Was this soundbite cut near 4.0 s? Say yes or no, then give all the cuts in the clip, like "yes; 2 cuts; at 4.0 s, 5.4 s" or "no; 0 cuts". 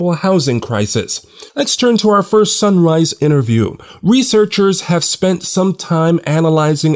no; 1 cut; at 1.5 s